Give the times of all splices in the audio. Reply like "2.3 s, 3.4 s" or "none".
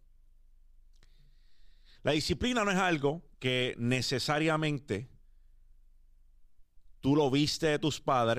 1.9 s, 3.3 s

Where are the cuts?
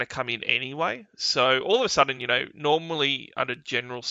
none

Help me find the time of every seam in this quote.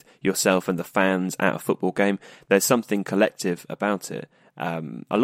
none

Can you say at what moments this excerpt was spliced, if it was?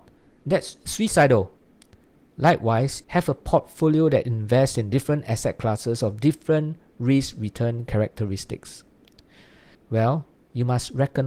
3.0 s, 9.7 s

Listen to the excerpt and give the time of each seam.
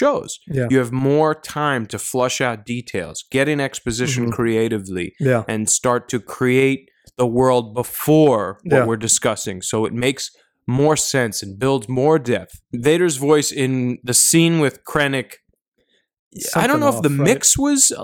12.6 s

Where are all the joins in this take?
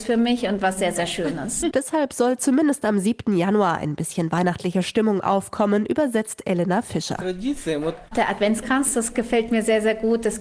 1.7 s, 8.1 s

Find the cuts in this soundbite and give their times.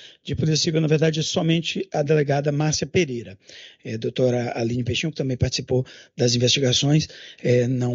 none

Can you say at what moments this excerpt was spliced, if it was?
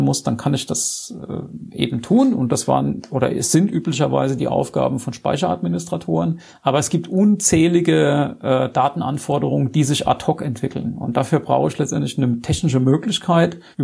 none

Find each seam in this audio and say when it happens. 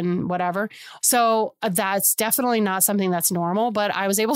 1.0 s

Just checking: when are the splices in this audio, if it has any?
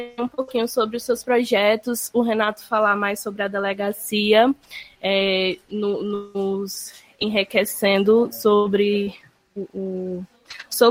none

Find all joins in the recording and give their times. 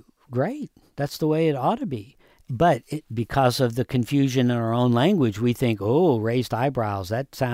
none

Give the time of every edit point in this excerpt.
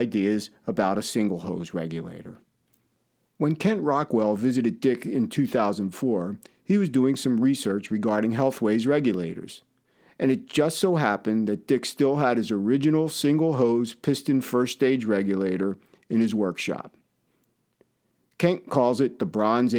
none

